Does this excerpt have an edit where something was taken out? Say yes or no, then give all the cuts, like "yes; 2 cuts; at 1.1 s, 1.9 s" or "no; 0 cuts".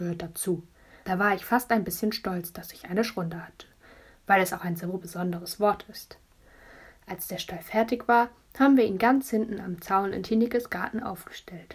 yes; 1 cut; at 1.0 s